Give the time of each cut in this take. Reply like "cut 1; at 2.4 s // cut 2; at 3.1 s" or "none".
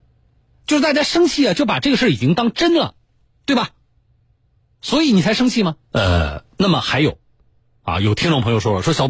cut 1; at 5.9 s